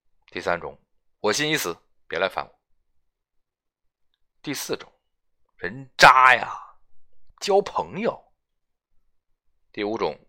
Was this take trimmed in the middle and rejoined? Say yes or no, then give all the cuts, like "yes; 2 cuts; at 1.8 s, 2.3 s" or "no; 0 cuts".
yes; 1 cut; at 7.3 s